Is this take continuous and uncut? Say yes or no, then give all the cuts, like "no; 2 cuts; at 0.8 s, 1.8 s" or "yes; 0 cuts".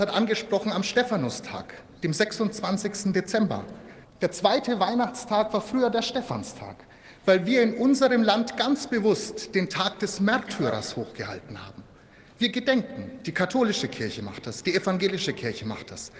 no; 1 cut; at 4.0 s